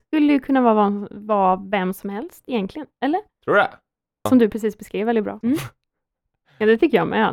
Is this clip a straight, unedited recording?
no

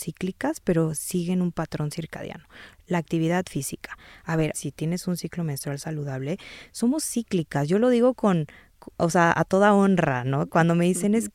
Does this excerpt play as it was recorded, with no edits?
no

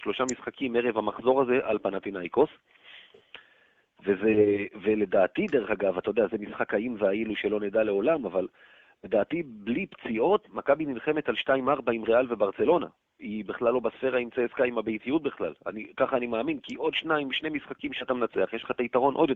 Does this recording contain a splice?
no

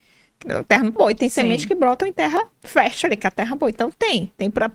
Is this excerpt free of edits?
no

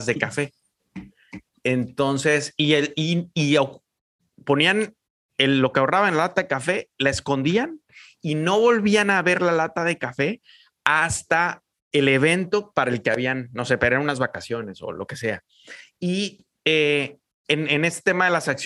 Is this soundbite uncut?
yes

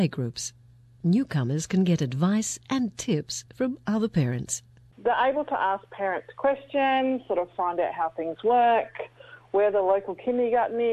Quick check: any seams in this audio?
no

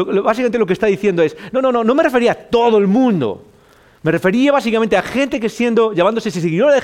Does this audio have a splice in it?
no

